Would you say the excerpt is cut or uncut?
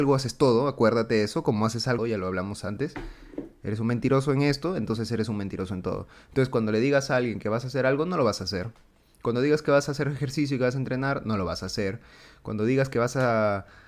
cut